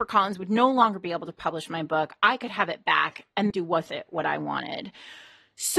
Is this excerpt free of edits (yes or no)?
no